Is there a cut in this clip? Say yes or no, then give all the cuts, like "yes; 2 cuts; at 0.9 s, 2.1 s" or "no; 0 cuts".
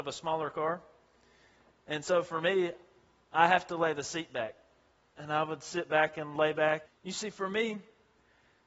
yes; 1 cut; at 6.9 s